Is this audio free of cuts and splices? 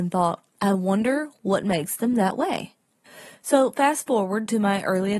yes; 0 cuts

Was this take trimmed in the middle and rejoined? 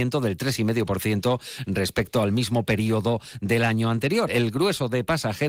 yes; 1 cut; at 4.3 s

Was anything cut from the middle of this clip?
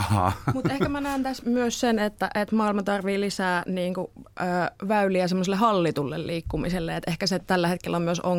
yes; 1 cut; at 1.4 s

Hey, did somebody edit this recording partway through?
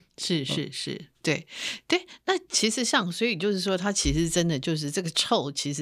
no; 0 cuts

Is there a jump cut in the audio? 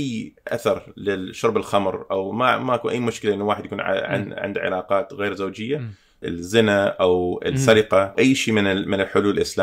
yes; 2 cuts; at 6.2 s, 8.1 s

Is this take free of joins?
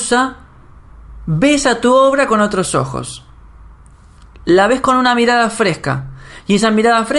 yes; 0 cuts

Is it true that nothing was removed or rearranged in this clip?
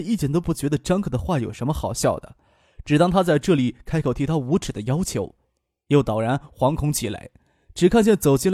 yes; 0 cuts

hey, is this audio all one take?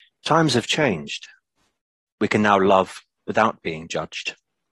no; 1 cut; at 2.1 s

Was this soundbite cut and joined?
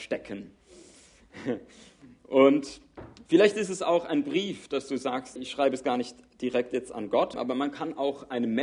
yes; 2 cuts; at 5.4 s, 7.3 s

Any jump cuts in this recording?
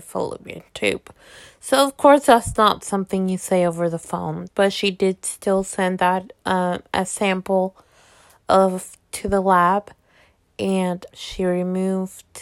yes; 2 cuts; at 4.5 s, 11.1 s

